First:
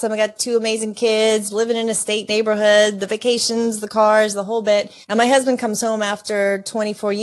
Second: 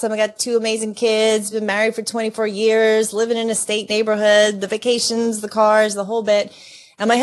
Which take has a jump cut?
first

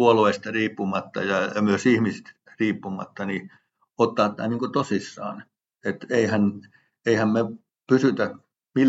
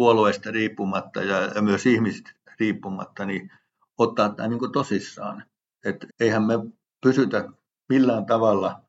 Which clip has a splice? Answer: second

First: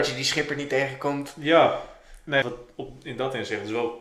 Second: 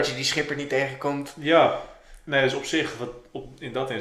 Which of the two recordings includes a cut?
first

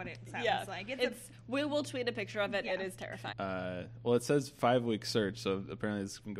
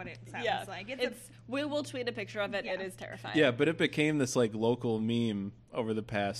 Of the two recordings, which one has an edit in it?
first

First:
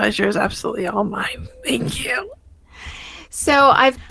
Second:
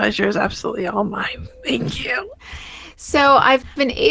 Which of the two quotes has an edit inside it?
second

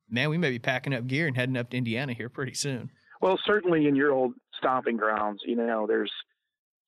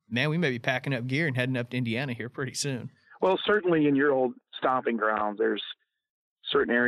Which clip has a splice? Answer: second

